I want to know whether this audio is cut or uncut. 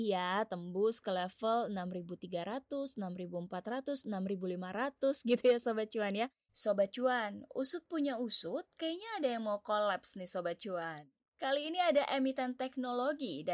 cut